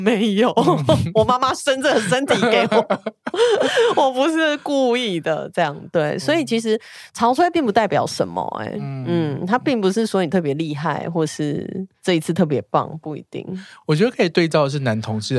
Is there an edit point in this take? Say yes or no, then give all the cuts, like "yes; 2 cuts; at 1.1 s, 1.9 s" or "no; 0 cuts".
no; 0 cuts